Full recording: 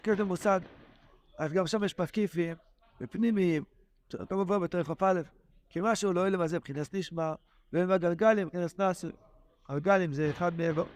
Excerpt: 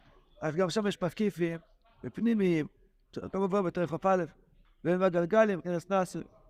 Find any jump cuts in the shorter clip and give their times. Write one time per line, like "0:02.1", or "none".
0:04.6